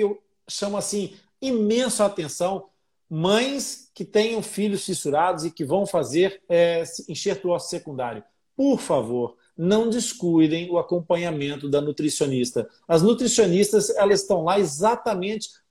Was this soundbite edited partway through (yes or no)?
no